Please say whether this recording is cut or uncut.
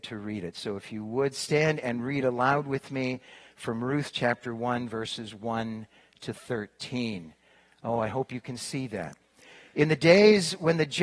uncut